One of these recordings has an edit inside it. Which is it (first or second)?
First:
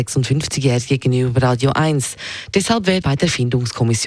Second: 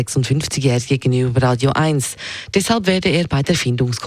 first